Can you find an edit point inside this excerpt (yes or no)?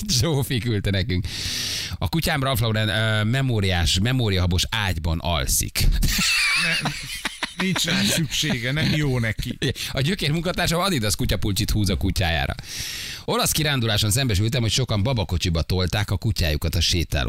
yes